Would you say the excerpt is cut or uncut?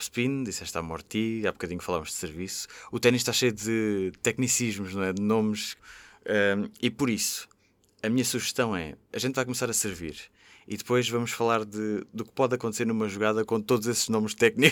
uncut